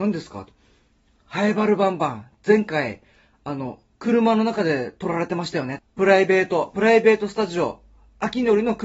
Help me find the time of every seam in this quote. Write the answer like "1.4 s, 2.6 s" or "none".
5.8 s